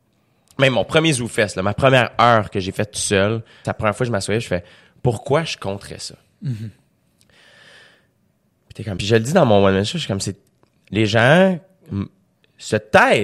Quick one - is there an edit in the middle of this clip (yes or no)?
yes